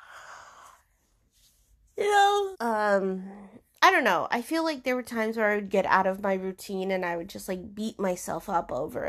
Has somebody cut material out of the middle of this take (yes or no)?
yes